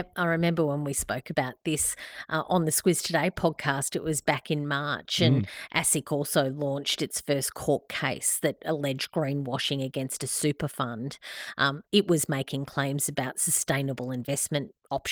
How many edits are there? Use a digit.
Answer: 0